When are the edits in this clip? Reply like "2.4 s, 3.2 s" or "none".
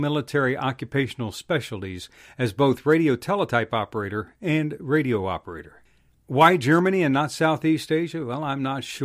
none